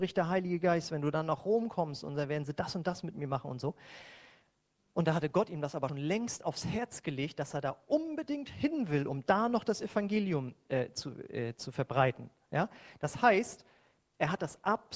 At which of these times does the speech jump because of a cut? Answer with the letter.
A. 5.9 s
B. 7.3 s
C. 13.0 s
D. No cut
A